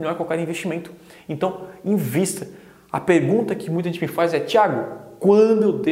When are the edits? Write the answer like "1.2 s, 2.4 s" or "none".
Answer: none